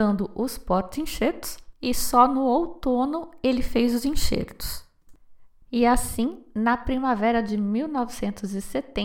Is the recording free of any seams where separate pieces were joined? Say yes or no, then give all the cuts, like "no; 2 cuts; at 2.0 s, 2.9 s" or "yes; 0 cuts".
no; 2 cuts; at 1.7 s, 5.6 s